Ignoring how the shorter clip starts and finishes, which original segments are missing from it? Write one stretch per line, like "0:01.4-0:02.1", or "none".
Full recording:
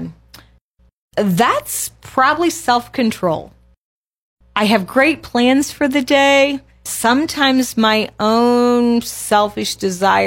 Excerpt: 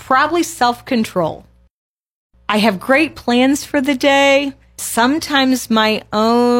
none